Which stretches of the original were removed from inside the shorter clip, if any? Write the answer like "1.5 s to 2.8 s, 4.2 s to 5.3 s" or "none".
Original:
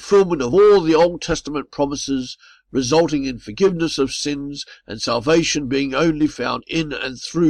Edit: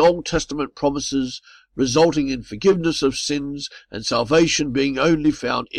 none